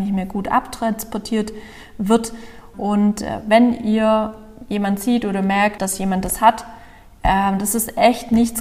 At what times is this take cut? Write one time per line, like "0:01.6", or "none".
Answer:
0:02.7
0:05.8